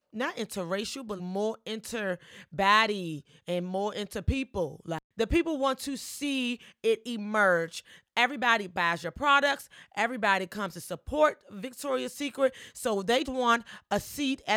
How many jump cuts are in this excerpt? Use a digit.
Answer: 2